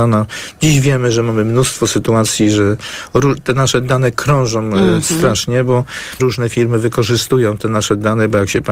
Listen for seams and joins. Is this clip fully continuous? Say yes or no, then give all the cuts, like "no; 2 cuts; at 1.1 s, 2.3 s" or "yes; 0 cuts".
no; 1 cut; at 6.2 s